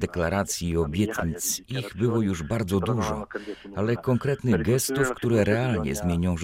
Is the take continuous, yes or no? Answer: yes